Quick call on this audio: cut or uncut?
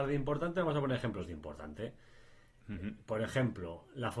uncut